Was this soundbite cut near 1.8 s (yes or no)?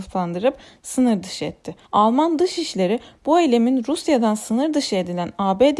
yes